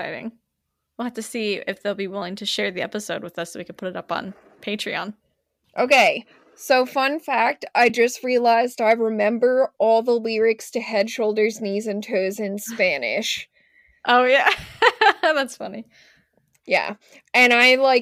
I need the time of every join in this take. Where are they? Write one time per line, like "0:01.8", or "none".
none